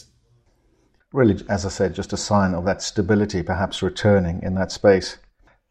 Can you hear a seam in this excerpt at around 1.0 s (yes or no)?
yes